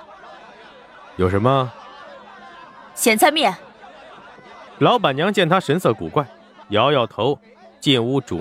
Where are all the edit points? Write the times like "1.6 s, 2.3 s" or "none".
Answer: 4.7 s, 6.6 s